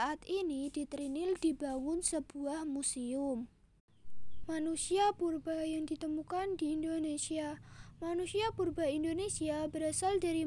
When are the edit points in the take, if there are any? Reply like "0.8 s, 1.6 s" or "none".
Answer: 4.4 s